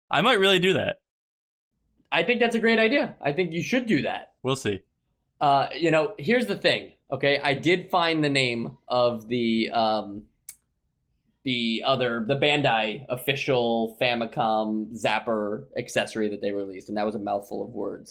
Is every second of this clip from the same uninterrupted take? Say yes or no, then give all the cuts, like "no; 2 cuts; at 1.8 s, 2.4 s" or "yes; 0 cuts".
no; 1 cut; at 4.4 s